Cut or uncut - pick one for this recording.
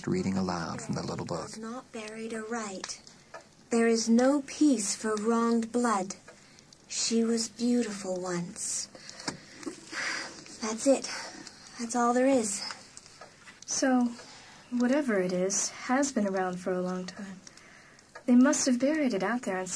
uncut